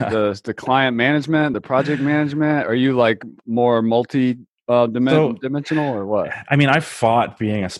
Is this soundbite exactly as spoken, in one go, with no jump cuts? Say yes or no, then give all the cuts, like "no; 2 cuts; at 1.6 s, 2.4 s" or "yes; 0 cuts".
yes; 0 cuts